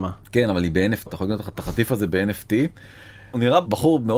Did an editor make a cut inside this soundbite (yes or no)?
yes